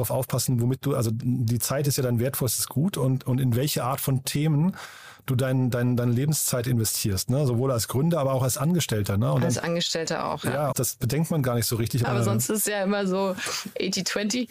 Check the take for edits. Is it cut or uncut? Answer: cut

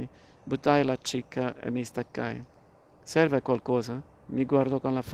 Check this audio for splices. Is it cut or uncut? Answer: uncut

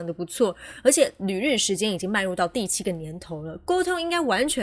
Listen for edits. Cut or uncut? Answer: uncut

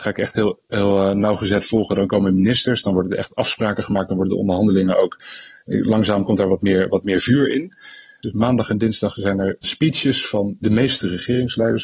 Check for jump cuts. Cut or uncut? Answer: cut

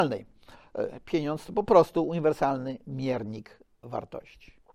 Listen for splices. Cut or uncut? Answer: uncut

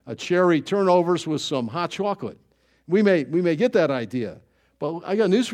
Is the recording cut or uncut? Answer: uncut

